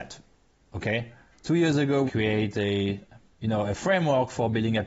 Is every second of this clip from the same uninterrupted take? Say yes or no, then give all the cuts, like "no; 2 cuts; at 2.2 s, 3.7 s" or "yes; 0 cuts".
no; 1 cut; at 2.1 s